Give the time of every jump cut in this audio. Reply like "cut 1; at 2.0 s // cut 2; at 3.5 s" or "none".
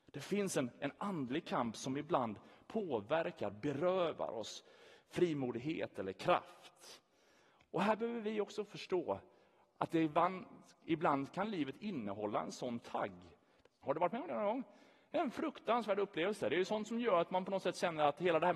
cut 1; at 13.8 s